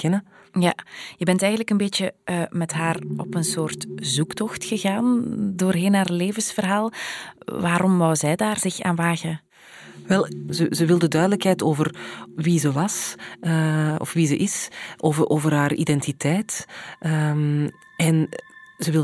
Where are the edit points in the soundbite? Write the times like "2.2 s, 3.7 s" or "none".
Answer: none